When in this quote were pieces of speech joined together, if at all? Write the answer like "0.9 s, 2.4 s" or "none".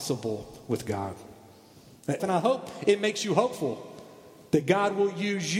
2.2 s